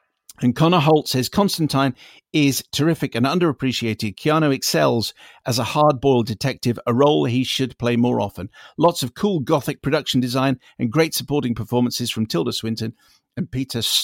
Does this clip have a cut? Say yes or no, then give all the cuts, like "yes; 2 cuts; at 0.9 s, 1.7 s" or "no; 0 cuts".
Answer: no; 0 cuts